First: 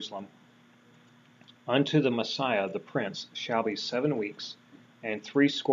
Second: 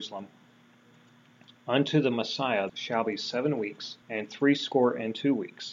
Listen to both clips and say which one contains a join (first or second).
second